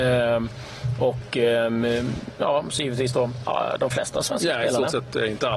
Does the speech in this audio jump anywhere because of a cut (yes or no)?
no